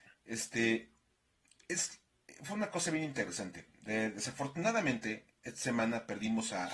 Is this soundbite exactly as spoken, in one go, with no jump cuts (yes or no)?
yes